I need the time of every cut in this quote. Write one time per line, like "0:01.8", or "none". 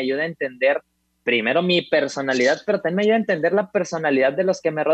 none